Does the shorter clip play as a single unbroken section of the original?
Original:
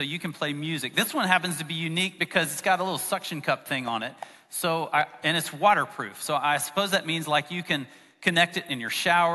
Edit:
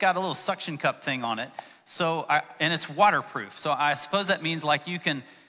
yes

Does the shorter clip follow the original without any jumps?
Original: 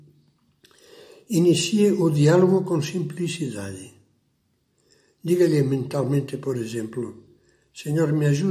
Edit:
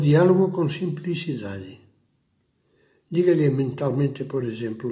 yes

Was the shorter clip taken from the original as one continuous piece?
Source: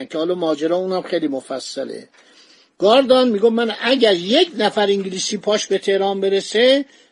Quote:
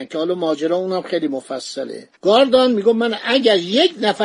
no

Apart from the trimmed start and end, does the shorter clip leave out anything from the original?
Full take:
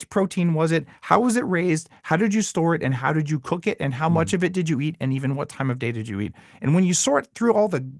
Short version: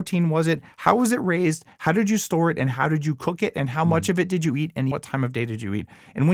yes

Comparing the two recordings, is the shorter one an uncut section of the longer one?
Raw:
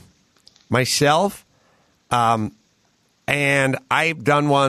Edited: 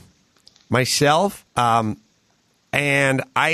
no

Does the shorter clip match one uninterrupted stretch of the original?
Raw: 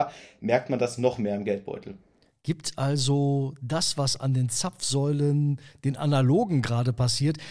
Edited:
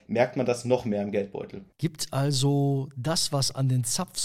no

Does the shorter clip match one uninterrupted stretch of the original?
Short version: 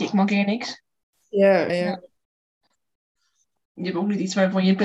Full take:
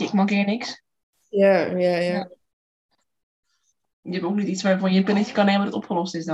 no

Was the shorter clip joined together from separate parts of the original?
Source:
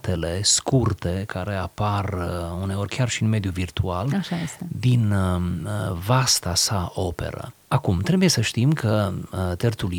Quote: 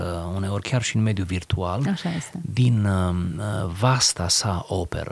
no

